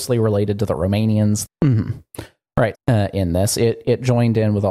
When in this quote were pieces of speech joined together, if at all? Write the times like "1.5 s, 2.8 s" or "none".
1.4 s, 2.7 s